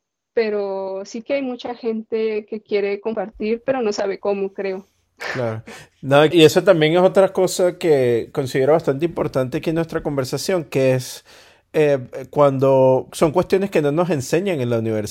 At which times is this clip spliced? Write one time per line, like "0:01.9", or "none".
0:06.3
0:13.1